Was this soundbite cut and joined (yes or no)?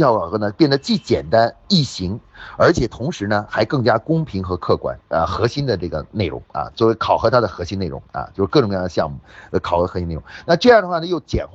yes